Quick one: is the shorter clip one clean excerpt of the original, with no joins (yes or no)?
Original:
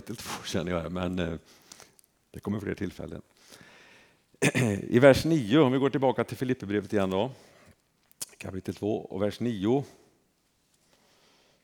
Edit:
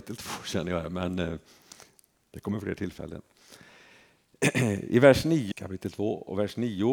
no